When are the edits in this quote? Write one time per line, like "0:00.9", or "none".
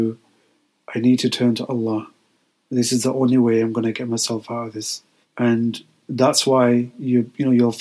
0:05.2